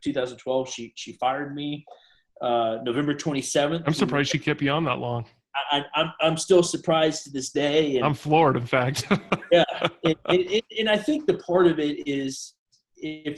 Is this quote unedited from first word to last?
yes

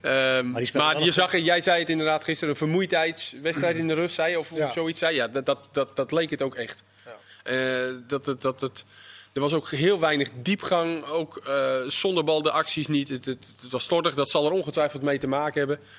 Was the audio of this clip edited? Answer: no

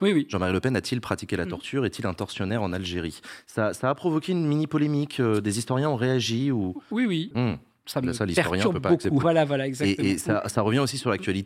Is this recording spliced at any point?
yes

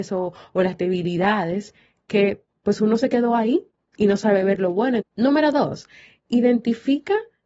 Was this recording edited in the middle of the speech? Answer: yes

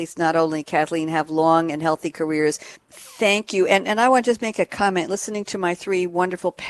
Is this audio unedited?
no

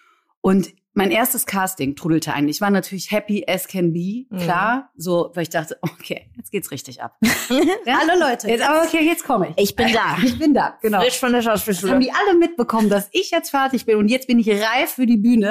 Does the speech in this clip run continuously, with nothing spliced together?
yes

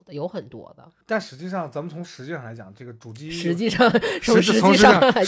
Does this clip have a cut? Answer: yes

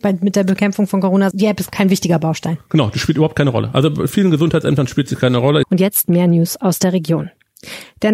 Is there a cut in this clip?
yes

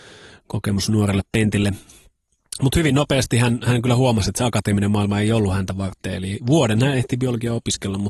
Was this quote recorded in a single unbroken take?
yes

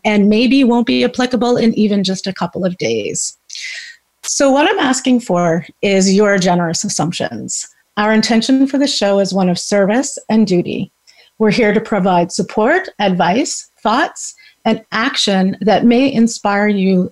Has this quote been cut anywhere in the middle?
no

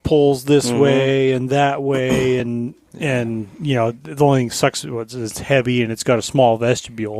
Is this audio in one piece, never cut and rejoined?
yes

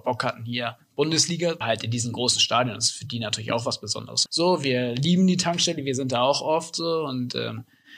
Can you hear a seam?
yes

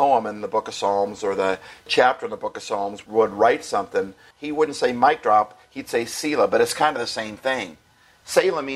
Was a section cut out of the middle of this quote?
yes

